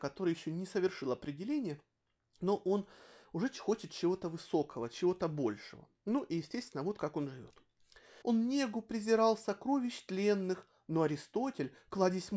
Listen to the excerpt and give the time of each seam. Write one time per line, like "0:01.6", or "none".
0:08.2